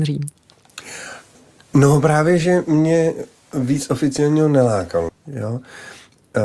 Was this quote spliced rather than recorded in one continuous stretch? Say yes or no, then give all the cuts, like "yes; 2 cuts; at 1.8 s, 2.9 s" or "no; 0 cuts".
yes; 1 cut; at 5.1 s